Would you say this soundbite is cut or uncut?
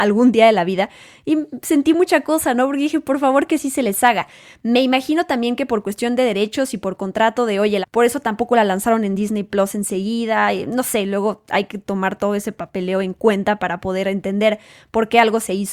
cut